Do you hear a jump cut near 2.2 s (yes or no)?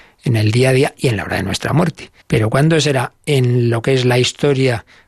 yes